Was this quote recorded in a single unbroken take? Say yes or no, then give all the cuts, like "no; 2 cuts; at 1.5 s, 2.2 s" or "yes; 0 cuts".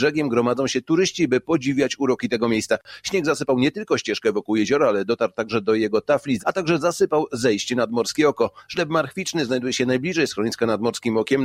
no; 2 cuts; at 6.4 s, 8.7 s